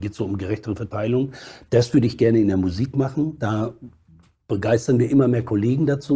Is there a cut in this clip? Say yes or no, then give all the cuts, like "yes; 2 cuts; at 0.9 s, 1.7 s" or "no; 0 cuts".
no; 0 cuts